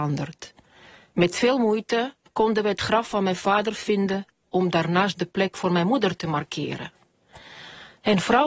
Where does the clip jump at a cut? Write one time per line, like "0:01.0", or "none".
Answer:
0:02.3